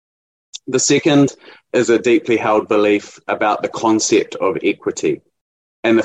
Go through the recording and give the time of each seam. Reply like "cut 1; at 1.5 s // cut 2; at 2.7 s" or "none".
none